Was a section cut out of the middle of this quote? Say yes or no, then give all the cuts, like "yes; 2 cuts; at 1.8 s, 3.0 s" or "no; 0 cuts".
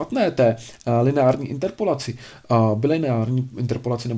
no; 0 cuts